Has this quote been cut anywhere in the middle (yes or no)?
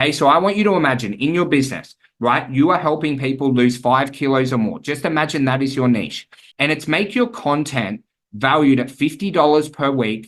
yes